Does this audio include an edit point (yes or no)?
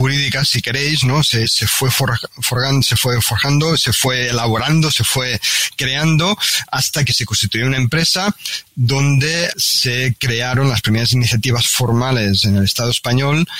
yes